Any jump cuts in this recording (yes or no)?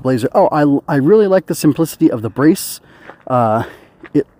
no